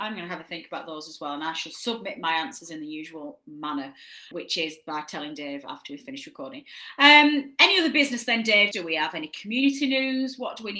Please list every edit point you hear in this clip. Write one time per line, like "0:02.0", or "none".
0:04.3
0:08.7